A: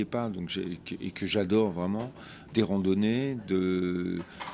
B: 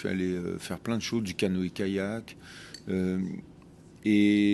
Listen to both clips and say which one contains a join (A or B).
A